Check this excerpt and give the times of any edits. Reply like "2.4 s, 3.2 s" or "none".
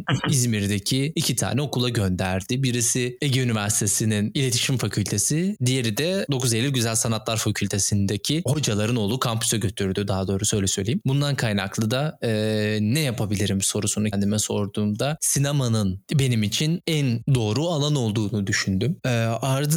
11.0 s, 14.1 s